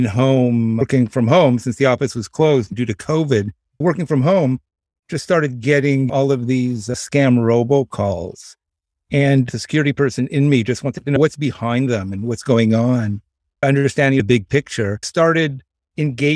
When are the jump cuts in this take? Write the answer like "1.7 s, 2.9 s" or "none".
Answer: none